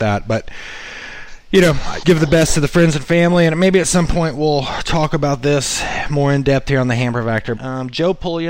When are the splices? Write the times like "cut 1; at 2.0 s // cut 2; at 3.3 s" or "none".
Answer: cut 1; at 2.0 s // cut 2; at 7.6 s